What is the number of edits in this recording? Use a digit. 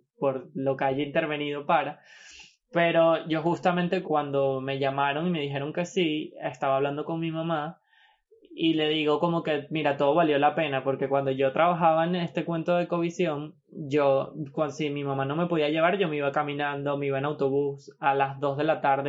1